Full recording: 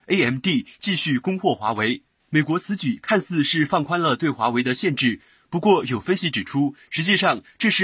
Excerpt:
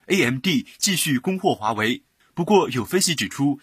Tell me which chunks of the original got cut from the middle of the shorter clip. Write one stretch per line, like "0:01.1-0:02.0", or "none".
0:02.2-0:05.4